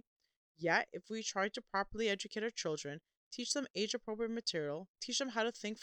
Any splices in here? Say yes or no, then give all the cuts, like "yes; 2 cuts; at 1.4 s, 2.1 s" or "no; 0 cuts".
no; 0 cuts